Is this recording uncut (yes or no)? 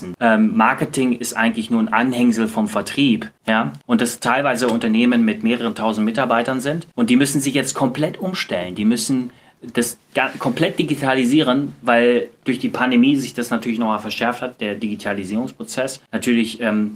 yes